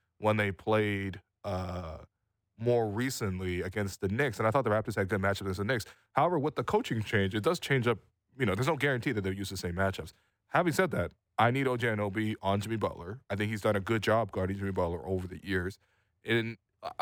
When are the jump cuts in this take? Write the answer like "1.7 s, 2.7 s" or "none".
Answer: none